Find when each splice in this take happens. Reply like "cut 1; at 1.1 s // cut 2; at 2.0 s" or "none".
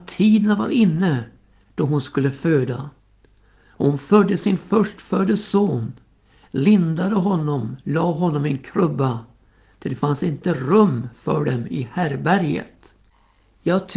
none